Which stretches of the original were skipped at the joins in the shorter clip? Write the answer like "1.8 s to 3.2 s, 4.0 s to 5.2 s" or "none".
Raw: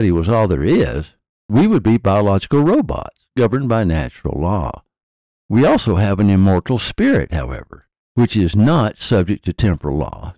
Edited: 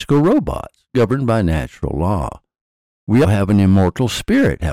5.7 s to 5.9 s